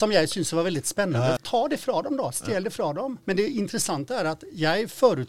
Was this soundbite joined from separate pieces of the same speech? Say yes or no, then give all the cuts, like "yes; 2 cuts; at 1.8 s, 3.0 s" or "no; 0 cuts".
yes; 2 cuts; at 1.4 s, 3.2 s